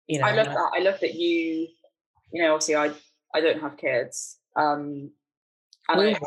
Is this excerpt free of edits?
yes; 0 cuts

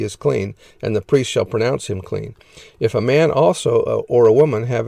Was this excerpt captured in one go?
yes; 0 cuts

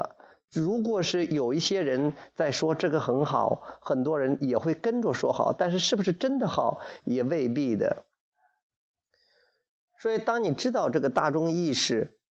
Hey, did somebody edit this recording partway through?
no; 0 cuts

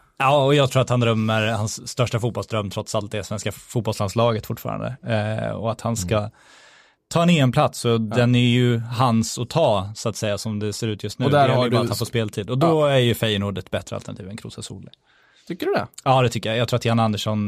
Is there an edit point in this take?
no; 0 cuts

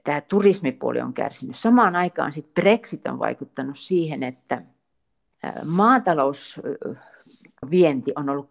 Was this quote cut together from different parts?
no; 0 cuts

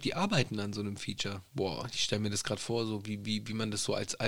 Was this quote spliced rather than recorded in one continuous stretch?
yes; 1 cut; at 1.5 s

